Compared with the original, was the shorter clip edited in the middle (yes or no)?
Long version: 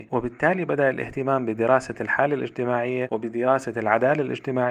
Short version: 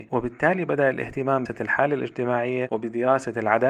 yes